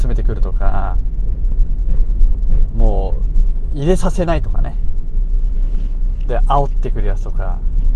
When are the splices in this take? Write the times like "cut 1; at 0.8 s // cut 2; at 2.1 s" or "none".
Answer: none